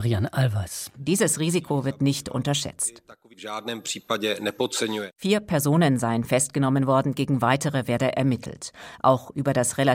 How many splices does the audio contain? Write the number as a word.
one